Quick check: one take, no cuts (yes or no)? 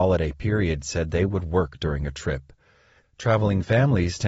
no